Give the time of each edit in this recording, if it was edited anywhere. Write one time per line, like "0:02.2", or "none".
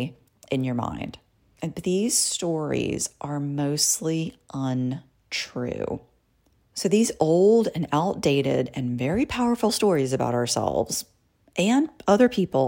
0:06.5